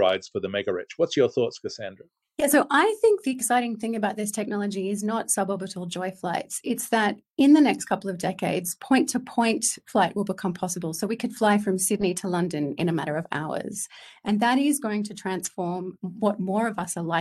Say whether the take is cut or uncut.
uncut